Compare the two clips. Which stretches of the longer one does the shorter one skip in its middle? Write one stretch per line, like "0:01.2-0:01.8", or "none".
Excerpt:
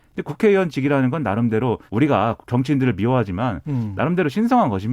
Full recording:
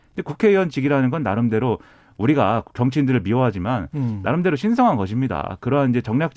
0:01.9-0:02.1